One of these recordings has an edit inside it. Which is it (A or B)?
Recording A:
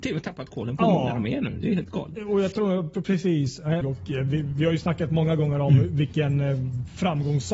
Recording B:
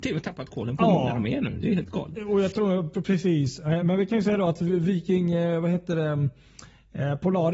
A